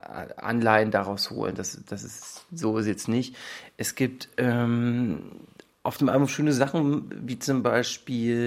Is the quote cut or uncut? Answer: uncut